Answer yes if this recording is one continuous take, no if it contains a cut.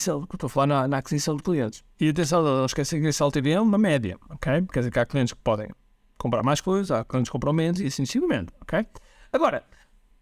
yes